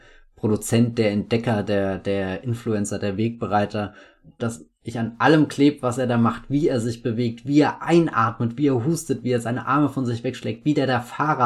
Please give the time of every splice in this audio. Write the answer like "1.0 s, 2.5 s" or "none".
4.4 s